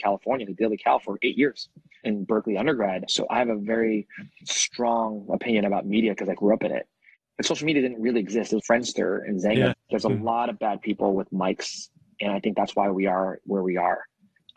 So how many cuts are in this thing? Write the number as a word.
three